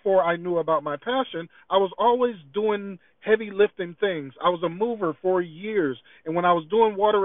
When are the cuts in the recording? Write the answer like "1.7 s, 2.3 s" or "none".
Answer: none